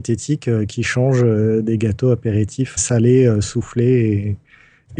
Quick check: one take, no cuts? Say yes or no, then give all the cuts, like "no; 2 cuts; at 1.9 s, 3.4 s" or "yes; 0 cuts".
no; 1 cut; at 2.8 s